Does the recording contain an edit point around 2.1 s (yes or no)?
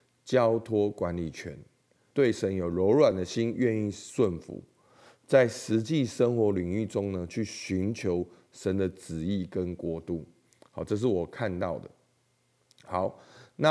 yes